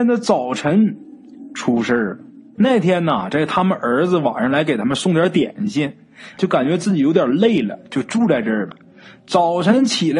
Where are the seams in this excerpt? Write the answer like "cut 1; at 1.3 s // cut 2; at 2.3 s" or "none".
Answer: cut 1; at 2.5 s // cut 2; at 6.4 s